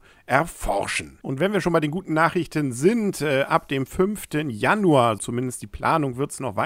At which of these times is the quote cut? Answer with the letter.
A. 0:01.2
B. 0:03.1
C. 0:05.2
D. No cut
C